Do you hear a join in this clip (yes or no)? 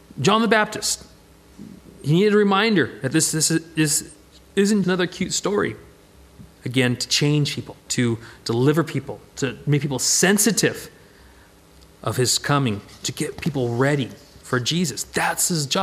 yes